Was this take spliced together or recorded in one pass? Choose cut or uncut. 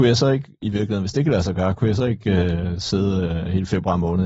uncut